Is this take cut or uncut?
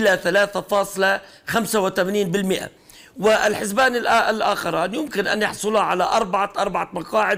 uncut